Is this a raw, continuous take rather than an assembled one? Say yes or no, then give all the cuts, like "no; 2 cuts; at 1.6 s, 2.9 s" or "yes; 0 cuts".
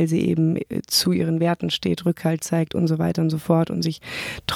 yes; 0 cuts